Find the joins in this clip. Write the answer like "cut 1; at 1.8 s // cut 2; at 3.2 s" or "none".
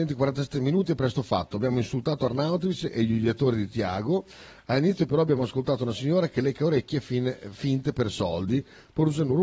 none

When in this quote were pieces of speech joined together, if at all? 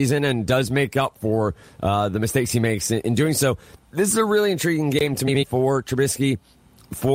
none

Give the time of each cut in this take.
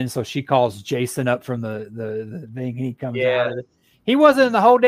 none

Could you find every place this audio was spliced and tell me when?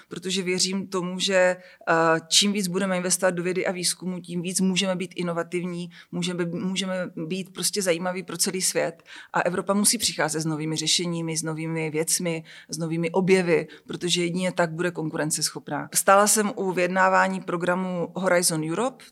none

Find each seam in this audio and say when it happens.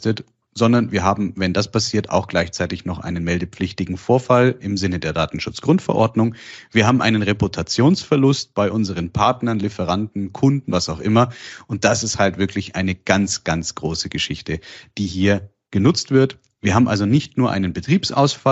cut 1; at 10.7 s // cut 2; at 16.6 s

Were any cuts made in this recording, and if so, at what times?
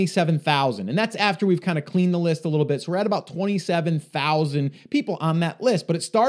none

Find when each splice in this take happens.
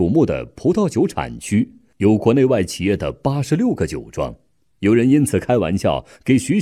cut 1; at 4.7 s

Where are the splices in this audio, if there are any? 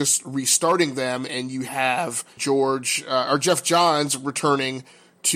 cut 1; at 2.4 s

